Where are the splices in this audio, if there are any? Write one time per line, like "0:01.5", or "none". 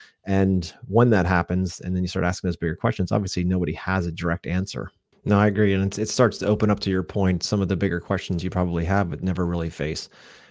0:05.1